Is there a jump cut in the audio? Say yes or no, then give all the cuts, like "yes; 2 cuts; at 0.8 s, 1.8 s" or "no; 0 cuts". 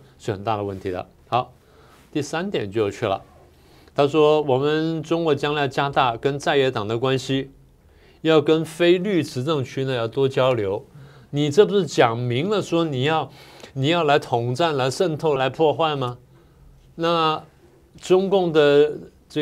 yes; 1 cut; at 15.4 s